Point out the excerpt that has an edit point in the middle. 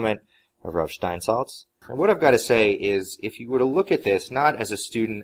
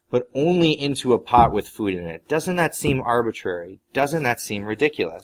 first; 1 cut; at 1.8 s

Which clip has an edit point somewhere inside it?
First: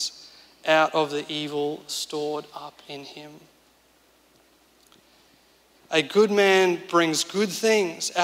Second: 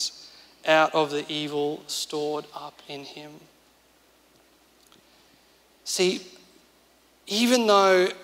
first; 1 cut; at 5.7 s

